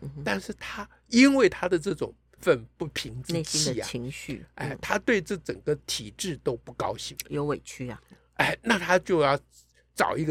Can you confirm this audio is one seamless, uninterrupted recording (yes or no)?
no